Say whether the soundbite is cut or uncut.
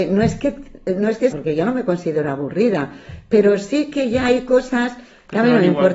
cut